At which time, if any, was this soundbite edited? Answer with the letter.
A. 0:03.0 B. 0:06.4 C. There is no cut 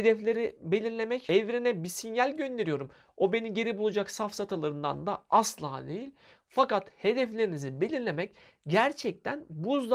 C